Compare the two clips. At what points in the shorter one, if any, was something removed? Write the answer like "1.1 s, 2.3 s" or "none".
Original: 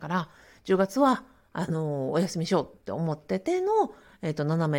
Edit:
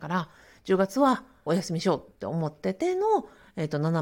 1.5 s